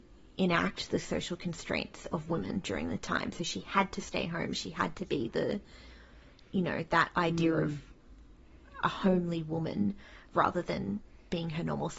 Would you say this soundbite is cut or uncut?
uncut